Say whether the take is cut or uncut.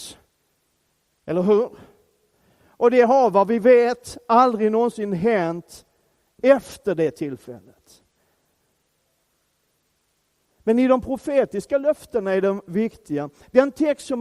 uncut